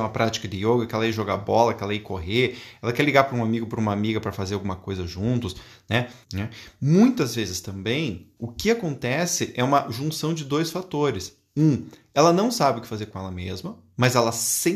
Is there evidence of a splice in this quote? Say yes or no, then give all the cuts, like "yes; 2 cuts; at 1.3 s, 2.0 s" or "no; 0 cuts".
yes; 2 cuts; at 6.2 s, 8.4 s